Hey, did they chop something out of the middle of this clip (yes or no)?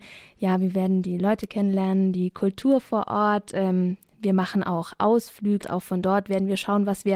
yes